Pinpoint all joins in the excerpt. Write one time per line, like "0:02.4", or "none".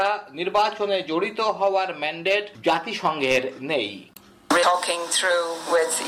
0:04.6